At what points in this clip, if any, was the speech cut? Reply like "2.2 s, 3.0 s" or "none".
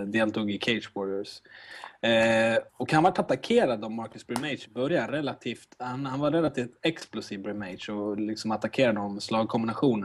2.7 s